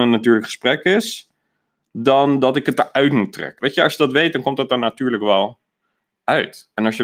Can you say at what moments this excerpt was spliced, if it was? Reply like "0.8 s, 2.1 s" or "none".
3.6 s